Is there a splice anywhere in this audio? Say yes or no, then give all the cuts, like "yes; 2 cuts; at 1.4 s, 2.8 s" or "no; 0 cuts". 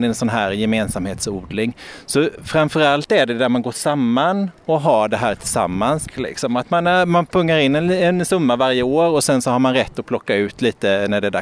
yes; 1 cut; at 6.0 s